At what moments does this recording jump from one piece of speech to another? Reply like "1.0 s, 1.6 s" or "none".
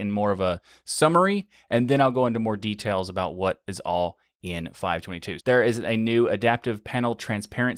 5.4 s

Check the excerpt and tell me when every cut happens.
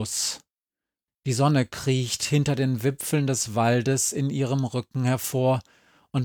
1.1 s

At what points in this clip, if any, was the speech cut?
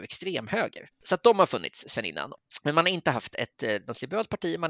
0.9 s

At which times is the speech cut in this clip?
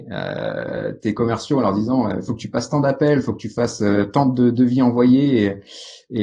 none

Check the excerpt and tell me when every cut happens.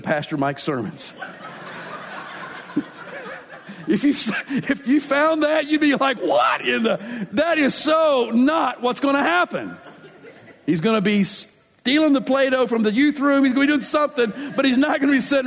none

